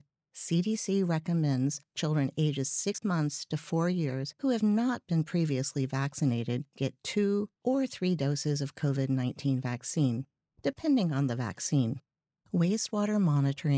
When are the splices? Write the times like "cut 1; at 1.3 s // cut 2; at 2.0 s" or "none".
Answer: cut 1; at 12.4 s